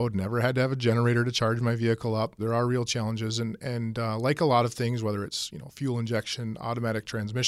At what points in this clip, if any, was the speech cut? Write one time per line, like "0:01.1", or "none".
0:02.4